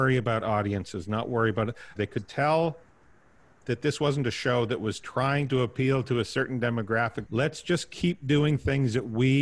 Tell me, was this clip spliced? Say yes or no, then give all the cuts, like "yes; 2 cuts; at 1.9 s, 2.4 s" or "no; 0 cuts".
yes; 2 cuts; at 2.0 s, 7.3 s